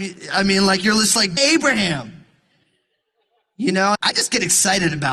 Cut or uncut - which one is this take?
cut